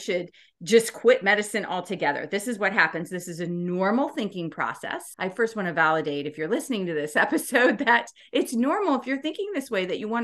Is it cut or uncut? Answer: cut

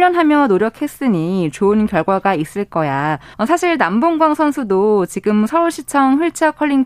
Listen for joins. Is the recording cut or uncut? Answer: cut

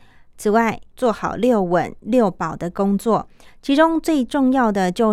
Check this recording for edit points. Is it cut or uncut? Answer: cut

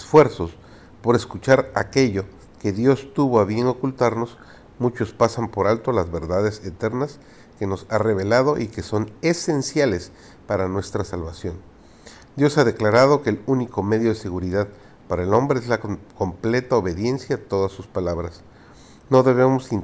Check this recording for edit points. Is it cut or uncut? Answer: uncut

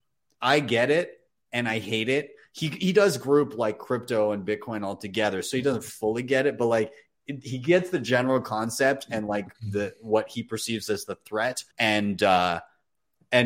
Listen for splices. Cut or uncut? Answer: cut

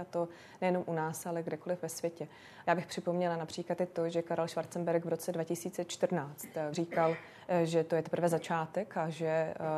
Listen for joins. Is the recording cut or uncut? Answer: cut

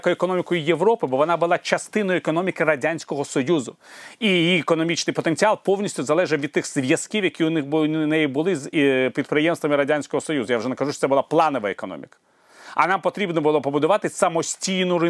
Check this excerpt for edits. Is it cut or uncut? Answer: uncut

